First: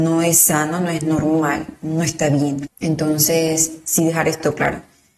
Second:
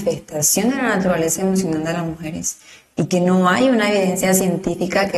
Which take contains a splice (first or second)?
first